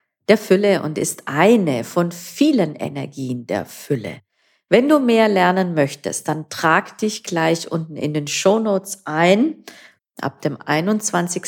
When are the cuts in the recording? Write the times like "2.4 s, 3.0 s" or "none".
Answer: 10.0 s